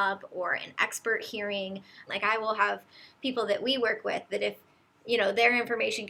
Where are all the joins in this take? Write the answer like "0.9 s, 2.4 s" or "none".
2.1 s